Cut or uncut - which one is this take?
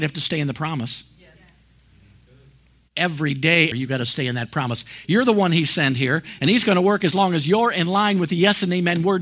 cut